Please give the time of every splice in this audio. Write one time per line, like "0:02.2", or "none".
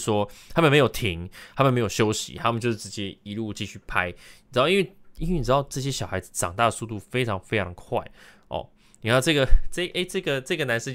none

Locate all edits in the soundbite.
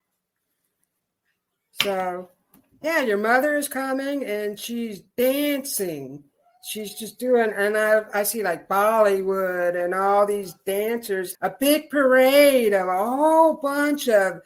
0:11.3

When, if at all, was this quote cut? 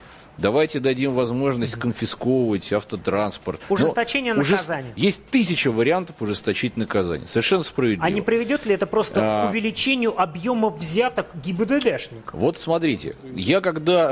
none

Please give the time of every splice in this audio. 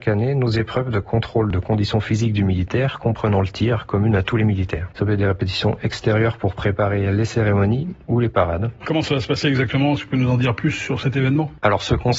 0:04.9
0:08.8

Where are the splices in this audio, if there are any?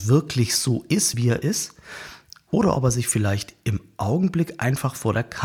none

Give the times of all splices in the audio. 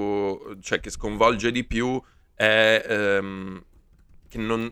none

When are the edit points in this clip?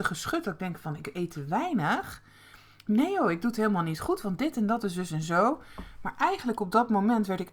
none

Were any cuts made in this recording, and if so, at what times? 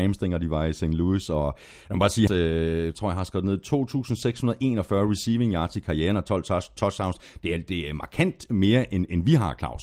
0:02.3

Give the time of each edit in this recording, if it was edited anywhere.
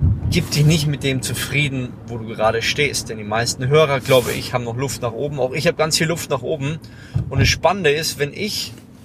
none

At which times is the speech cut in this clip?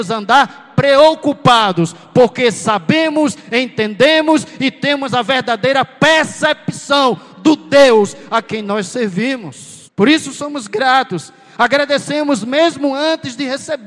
0:09.9

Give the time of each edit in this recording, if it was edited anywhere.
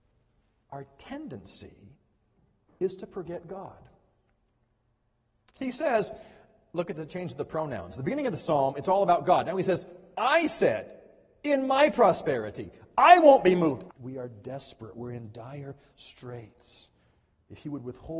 0:13.9

